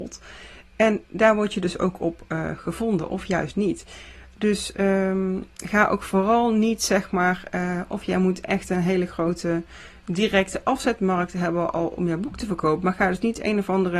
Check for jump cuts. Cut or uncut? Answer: uncut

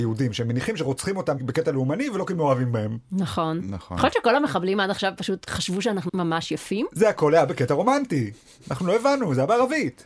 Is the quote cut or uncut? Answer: cut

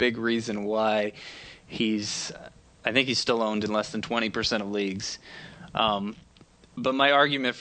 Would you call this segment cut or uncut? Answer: uncut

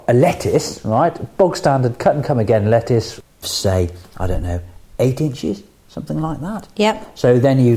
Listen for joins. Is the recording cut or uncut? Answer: cut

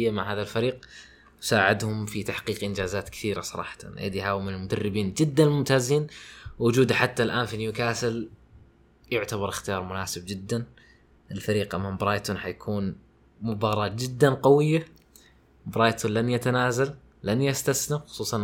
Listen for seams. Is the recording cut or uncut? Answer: uncut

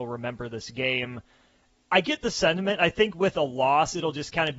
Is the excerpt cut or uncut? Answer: uncut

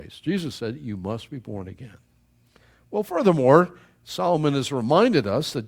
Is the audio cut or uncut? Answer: uncut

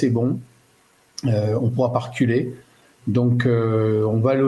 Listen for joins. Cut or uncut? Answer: uncut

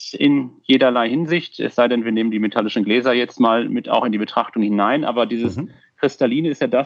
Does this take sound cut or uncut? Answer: uncut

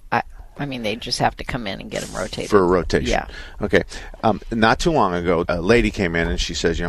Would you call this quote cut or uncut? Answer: cut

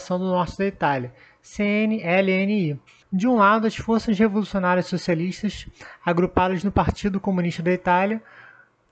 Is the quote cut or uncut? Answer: cut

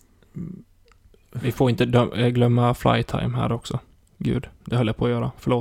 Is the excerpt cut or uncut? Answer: uncut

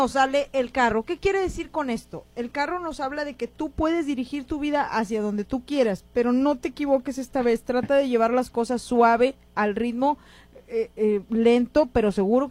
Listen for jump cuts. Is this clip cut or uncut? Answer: uncut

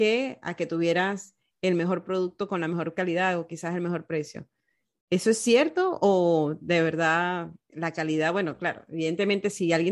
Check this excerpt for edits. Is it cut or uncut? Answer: cut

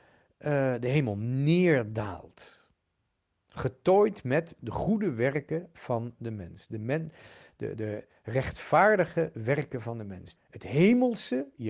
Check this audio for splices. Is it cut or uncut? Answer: cut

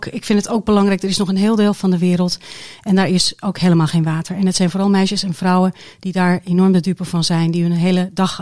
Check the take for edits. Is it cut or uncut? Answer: uncut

